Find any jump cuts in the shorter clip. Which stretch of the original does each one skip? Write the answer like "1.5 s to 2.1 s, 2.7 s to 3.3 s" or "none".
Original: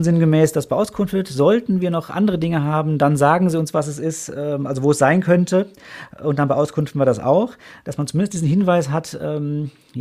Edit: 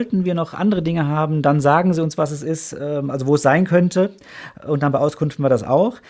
none